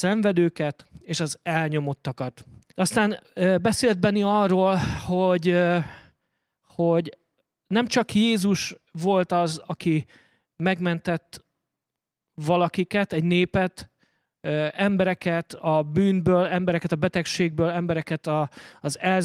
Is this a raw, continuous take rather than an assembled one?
no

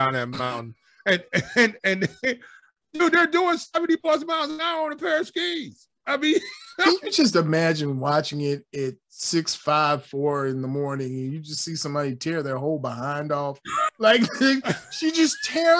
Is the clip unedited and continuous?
yes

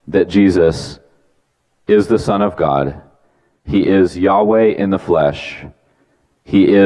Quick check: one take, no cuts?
yes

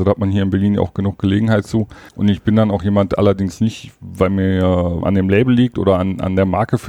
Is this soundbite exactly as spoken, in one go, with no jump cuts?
no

